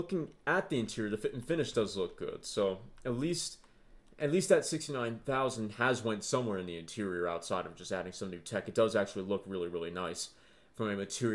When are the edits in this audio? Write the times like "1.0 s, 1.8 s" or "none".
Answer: none